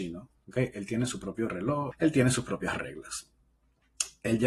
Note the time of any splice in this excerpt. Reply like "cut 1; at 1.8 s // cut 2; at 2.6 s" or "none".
cut 1; at 1.9 s